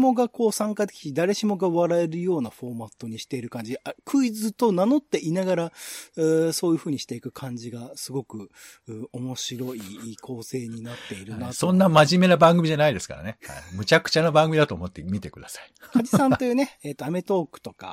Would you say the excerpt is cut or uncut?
uncut